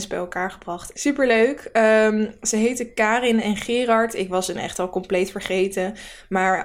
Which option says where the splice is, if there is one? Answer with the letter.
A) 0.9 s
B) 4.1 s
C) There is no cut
A